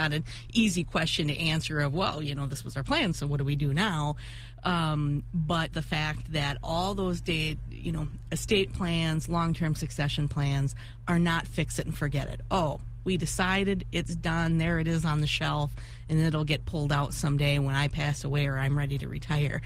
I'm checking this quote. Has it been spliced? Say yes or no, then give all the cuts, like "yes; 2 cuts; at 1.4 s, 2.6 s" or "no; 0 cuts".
yes; 1 cut; at 5.7 s